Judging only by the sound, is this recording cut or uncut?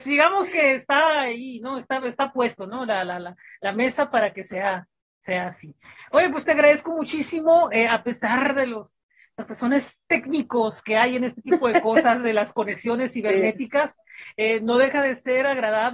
uncut